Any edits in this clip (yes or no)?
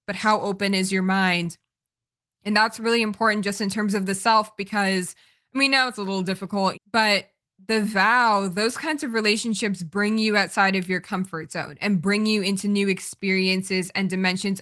yes